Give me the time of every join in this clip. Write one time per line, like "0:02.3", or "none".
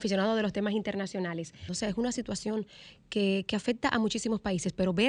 0:01.7

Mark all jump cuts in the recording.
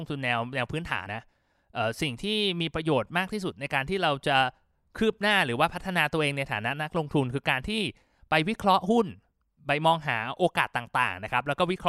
0:01.1

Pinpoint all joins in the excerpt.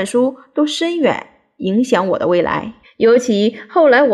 0:02.8

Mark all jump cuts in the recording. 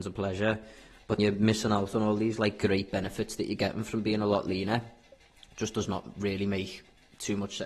0:01.2

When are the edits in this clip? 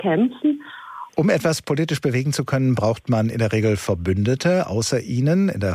0:01.1

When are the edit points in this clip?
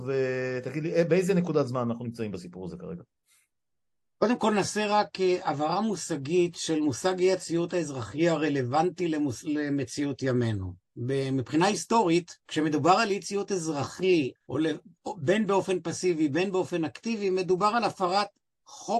0:12.4
0:14.4

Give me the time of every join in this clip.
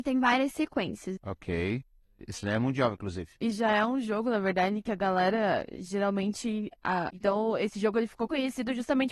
0:01.2
0:07.1

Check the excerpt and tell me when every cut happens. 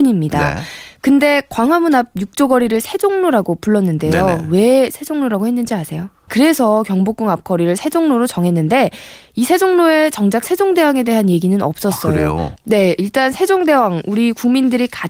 0:06.3
0:12.6

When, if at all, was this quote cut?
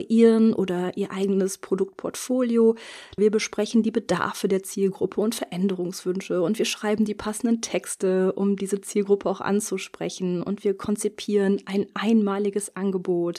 0:03.2

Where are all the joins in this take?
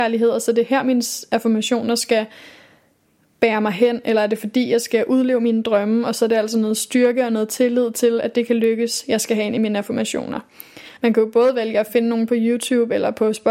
0:11.0

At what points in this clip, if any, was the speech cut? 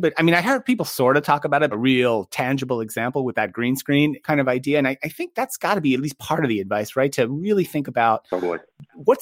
0:01.7
0:04.2

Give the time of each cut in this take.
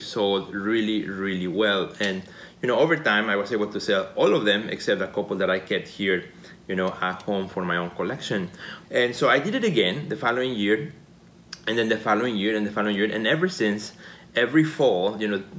0:08.8

